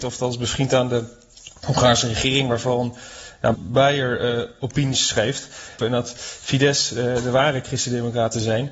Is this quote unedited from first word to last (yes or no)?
no